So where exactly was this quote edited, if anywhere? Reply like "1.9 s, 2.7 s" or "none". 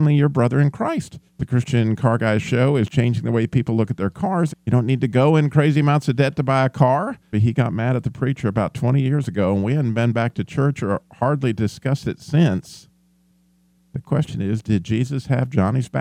1.3 s, 4.5 s, 7.3 s